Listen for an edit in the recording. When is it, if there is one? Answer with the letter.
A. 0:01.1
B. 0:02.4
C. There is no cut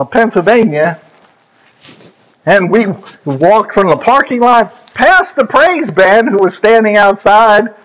C